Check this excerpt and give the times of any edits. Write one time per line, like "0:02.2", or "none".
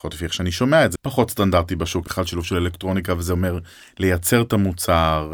0:00.9
0:02.0